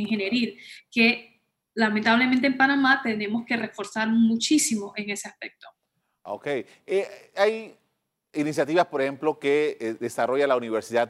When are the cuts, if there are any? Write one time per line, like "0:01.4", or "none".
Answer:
0:07.3